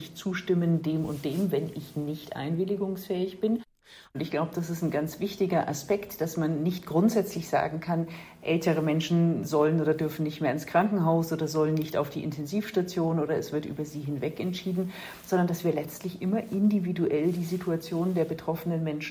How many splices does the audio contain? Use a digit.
1